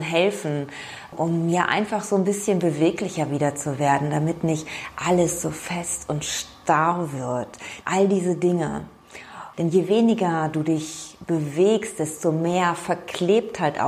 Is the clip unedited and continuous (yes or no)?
no